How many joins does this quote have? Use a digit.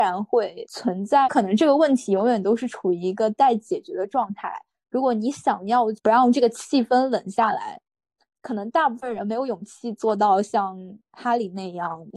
0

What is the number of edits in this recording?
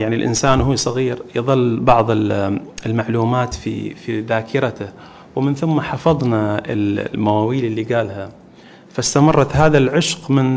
0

